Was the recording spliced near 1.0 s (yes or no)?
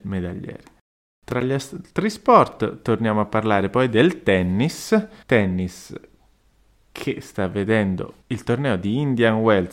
no